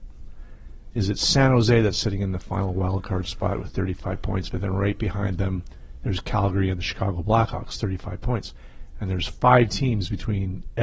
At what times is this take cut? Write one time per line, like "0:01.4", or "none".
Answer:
0:00.9